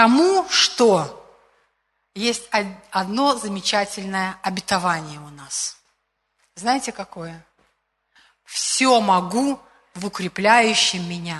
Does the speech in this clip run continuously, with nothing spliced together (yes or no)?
yes